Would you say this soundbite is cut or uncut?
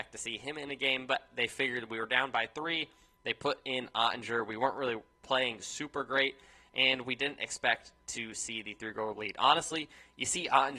uncut